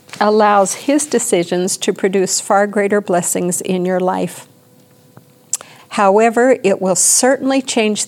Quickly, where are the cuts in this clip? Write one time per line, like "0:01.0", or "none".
0:05.8